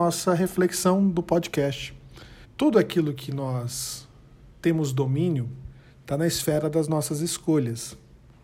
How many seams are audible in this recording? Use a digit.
1